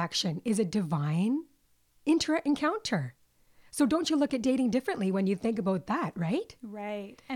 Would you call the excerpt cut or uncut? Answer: uncut